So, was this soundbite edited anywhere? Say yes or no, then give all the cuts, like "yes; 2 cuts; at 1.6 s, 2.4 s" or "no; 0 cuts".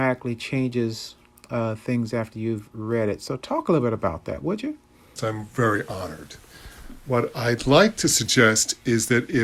yes; 1 cut; at 5.2 s